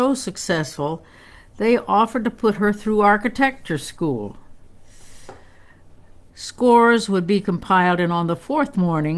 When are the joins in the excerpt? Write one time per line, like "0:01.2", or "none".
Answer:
0:06.3